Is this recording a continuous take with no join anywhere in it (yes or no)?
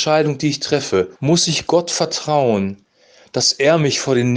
no